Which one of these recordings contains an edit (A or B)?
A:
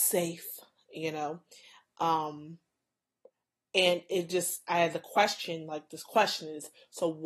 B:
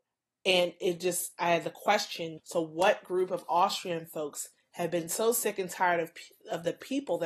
B